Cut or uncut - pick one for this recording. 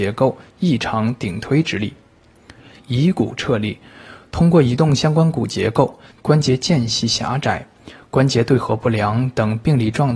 cut